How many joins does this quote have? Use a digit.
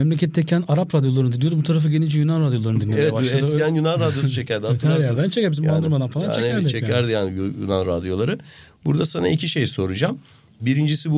0